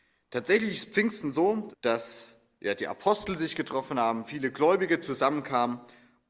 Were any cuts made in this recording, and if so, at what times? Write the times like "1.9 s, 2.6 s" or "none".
1.7 s